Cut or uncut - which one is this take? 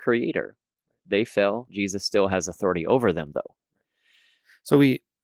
cut